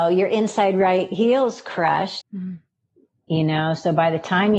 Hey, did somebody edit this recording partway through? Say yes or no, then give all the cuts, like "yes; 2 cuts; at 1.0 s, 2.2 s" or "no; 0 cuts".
yes; 1 cut; at 2.2 s